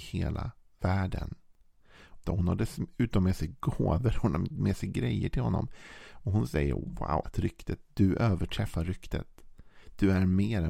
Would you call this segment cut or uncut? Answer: cut